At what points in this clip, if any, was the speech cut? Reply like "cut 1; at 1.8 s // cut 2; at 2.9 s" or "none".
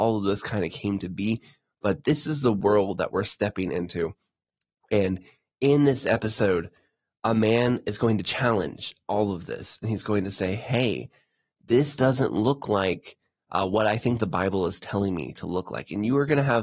none